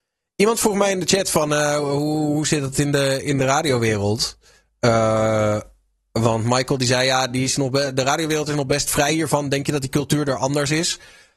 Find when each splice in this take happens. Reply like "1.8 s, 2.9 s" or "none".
none